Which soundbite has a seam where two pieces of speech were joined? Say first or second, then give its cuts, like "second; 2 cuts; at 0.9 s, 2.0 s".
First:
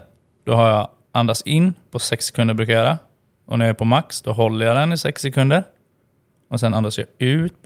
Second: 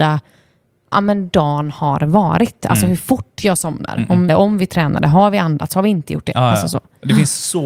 second; 1 cut; at 4.3 s